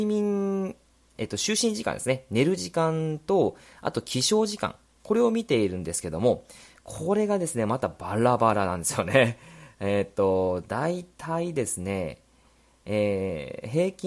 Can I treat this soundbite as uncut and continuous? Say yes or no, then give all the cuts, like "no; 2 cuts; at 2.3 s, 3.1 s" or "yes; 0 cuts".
yes; 0 cuts